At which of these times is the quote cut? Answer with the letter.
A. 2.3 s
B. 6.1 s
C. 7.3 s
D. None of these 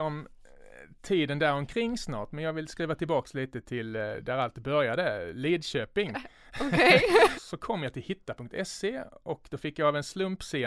C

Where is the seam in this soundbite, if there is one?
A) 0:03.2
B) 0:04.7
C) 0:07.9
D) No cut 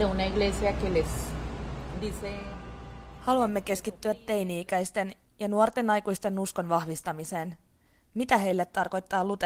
D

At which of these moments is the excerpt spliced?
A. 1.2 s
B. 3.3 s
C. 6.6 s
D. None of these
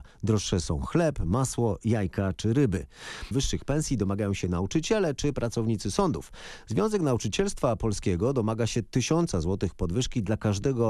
B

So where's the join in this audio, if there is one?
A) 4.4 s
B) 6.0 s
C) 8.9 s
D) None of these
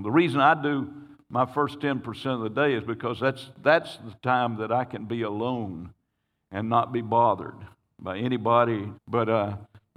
C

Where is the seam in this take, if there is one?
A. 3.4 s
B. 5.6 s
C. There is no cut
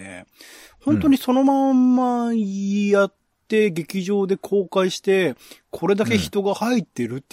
C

